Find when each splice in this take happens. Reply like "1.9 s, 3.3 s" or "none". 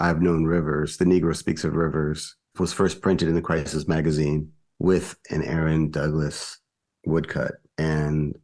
2.5 s